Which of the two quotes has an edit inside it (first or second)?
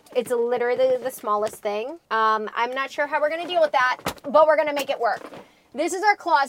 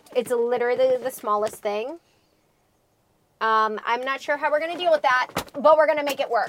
first